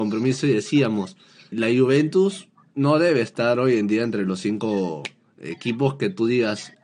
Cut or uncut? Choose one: cut